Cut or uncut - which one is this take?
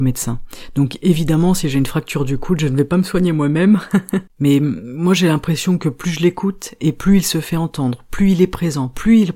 cut